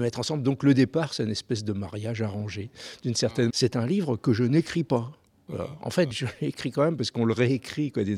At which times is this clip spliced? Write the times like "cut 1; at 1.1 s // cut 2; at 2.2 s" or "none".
cut 1; at 3.5 s // cut 2; at 6.1 s